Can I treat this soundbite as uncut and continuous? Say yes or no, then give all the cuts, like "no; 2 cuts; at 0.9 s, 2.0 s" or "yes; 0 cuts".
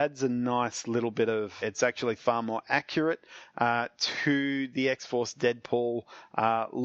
no; 1 cut; at 1.6 s